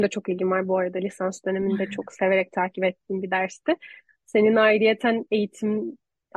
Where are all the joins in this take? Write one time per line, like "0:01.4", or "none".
none